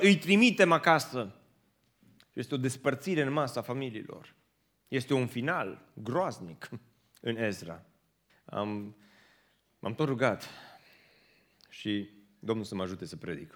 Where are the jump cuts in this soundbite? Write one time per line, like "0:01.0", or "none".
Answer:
0:08.3